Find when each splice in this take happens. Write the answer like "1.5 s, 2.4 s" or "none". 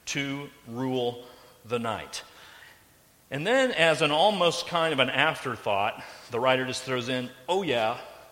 none